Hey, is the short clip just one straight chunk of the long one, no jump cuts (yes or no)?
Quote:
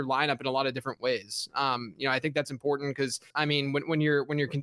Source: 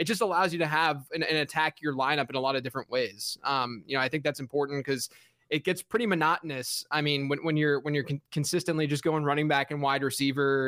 no